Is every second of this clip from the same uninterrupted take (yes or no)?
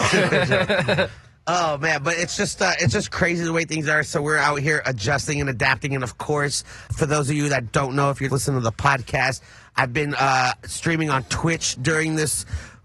no